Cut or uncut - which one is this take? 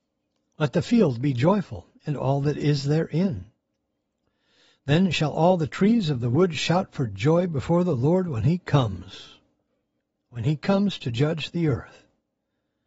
uncut